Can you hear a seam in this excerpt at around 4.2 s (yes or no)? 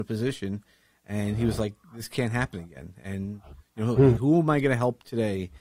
yes